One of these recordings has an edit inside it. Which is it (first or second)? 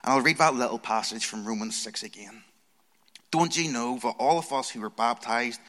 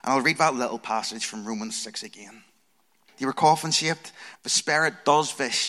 second